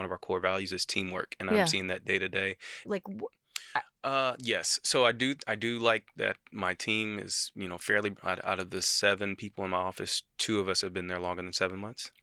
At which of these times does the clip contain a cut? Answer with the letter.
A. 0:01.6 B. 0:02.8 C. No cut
B